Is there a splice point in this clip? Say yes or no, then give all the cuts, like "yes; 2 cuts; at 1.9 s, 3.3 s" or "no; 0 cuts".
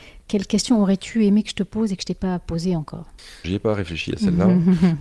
yes; 1 cut; at 3.4 s